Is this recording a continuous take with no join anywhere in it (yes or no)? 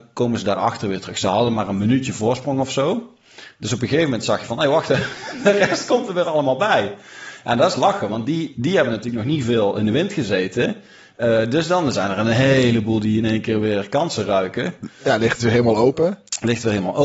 yes